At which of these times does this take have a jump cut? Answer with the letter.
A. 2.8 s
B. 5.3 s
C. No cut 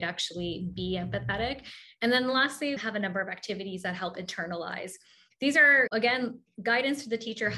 A